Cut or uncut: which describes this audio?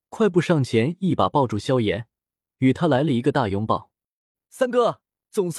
uncut